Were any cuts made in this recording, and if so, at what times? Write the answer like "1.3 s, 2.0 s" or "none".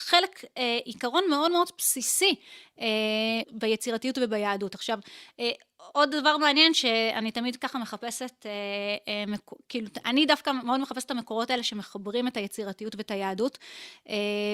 3.4 s